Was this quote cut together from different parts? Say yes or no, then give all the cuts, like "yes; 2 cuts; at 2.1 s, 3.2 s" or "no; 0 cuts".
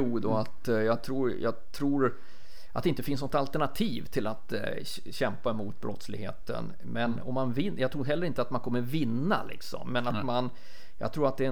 no; 0 cuts